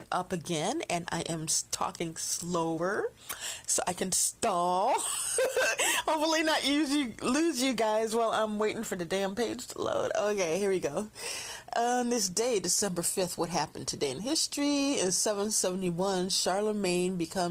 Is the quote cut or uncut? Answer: uncut